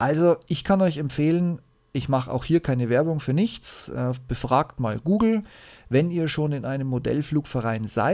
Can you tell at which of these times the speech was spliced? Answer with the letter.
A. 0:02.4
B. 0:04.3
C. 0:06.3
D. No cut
D